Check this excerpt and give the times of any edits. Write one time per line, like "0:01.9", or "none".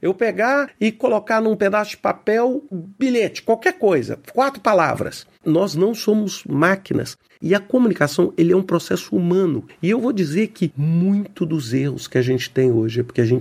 0:02.7
0:05.3
0:07.3